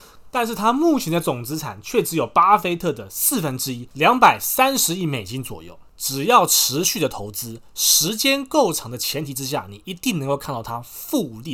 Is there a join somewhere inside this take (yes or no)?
no